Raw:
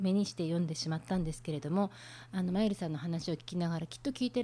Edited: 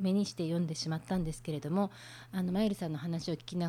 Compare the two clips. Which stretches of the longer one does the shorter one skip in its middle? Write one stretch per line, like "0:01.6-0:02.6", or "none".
none